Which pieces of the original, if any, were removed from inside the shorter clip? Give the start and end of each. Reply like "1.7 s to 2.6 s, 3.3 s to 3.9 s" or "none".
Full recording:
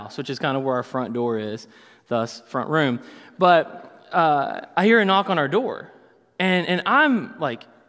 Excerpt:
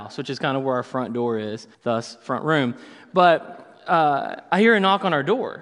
1.7 s to 2.0 s